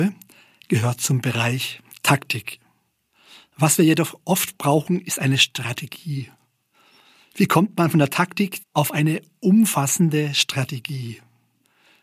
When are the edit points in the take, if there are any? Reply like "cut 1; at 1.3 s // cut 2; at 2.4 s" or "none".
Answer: cut 1; at 8.6 s